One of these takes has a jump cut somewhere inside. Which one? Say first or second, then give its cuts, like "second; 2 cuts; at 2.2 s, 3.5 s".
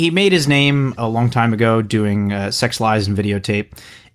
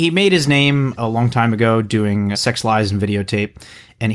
second; 1 cut; at 2.3 s